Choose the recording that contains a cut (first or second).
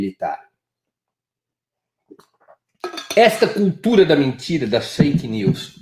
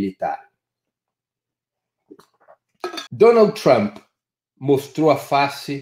second